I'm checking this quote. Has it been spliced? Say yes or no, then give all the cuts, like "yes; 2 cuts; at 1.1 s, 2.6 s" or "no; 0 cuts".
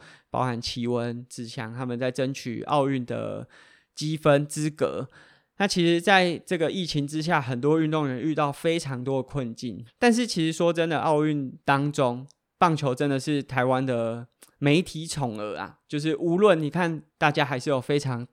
yes; 3 cuts; at 9.9 s, 11.6 s, 17.1 s